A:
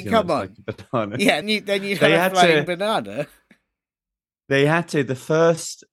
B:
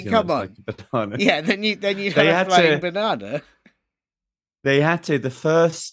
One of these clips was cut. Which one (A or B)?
A